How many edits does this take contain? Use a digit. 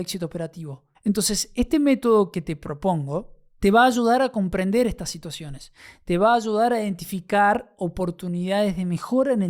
1